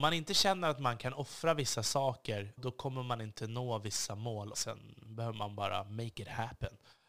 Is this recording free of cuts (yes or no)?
no